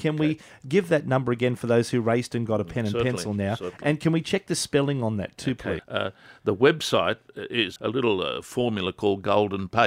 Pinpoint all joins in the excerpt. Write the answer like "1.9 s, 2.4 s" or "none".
5.8 s, 7.8 s